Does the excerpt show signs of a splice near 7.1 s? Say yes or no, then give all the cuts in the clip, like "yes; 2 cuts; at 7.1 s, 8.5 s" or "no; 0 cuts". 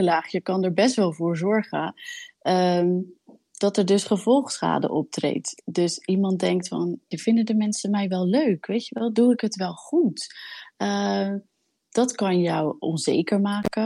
yes; 1 cut; at 7.1 s